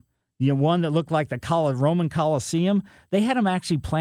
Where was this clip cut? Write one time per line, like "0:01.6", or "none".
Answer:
none